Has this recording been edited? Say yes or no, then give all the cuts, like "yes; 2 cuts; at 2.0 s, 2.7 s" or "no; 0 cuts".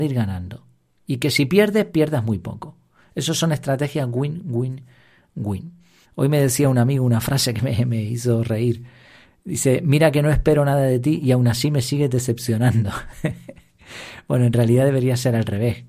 yes; 1 cut; at 6.0 s